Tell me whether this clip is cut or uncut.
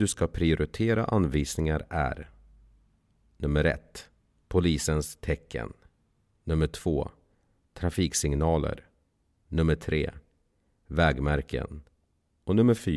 uncut